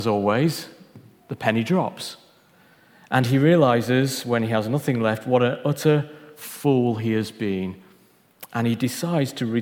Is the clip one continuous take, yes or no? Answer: yes